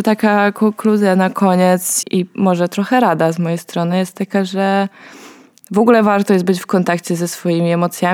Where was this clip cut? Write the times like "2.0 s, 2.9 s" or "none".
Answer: 2.0 s